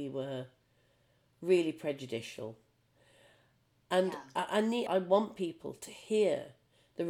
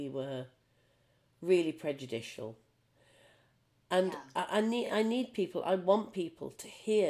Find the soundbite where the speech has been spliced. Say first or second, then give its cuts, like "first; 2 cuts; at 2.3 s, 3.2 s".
first; 1 cut; at 4.9 s